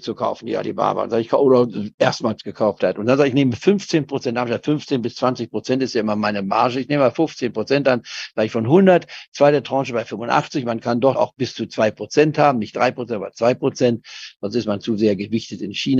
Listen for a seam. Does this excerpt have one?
yes; 1 cut; at 11.2 s

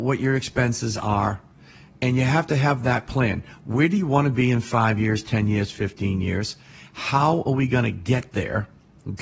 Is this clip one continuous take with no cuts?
yes; 0 cuts

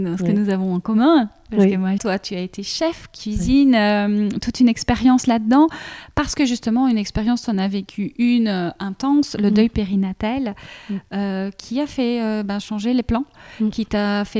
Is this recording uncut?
no; 1 cut; at 2.0 s

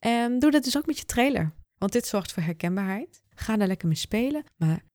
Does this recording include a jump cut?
yes; 2 cuts; at 1.6 s, 3.3 s

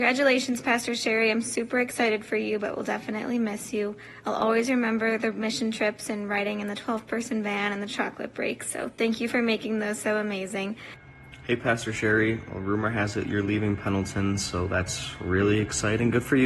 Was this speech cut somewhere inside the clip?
no; 0 cuts

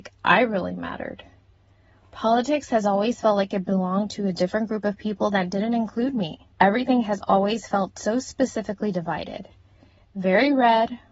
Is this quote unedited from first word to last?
no; 1 cut; at 6.5 s

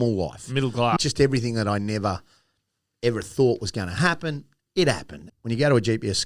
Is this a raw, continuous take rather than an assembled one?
no; 2 cuts; at 1.0 s, 5.3 s

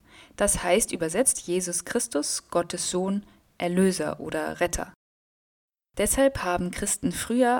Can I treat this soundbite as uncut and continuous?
yes; 0 cuts

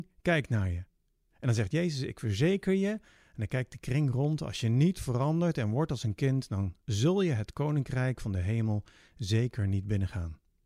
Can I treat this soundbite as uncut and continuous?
yes; 0 cuts

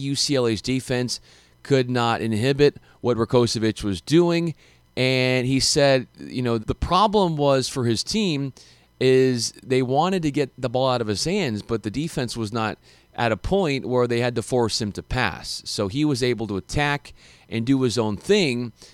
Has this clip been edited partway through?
yes; 1 cut; at 6.6 s

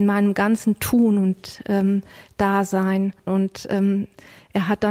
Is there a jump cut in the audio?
yes; 1 cut; at 3.3 s

